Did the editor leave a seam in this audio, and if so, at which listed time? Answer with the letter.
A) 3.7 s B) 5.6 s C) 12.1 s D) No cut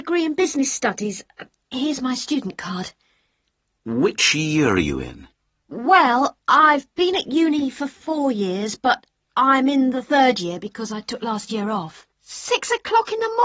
C